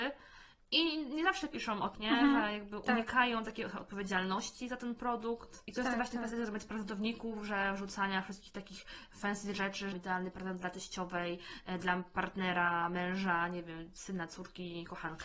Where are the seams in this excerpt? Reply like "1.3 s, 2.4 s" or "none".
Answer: 1.9 s, 9.9 s